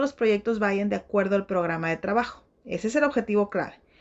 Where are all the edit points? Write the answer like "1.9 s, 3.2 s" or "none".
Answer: none